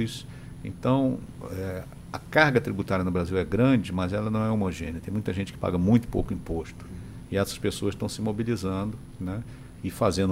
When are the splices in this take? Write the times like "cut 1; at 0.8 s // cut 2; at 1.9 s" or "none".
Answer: none